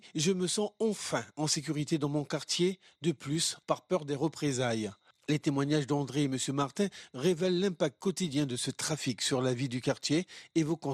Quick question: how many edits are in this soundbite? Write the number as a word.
one